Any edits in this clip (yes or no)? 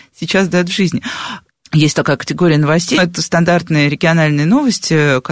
yes